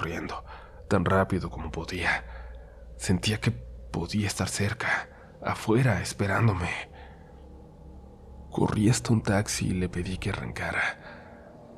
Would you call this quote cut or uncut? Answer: uncut